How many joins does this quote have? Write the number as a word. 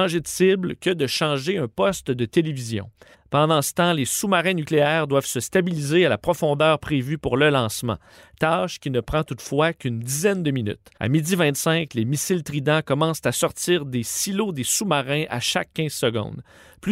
two